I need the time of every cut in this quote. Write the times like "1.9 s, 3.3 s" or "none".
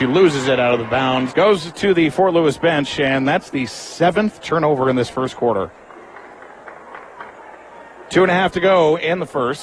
1.3 s